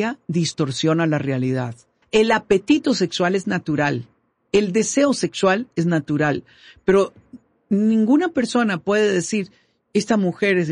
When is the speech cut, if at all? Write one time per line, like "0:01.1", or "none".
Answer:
0:02.0